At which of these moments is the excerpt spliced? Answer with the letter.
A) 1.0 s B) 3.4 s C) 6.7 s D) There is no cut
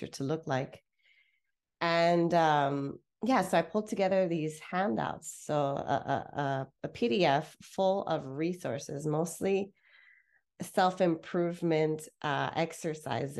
D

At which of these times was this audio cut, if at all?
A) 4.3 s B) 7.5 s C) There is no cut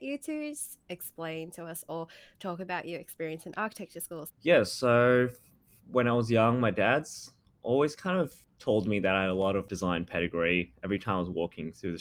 A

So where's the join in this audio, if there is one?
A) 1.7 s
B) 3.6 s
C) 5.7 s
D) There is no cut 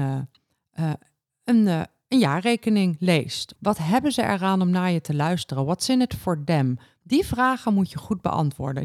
B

